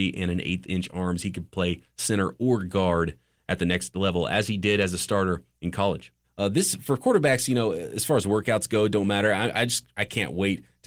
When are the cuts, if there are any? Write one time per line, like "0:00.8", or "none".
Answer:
0:06.2